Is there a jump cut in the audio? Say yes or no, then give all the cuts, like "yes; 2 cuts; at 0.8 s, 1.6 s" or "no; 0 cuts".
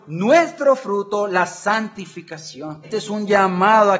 yes; 1 cut; at 2.8 s